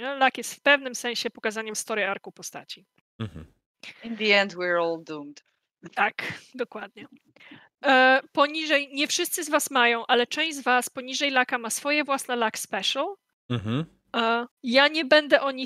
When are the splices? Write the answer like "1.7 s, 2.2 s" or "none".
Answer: 14.5 s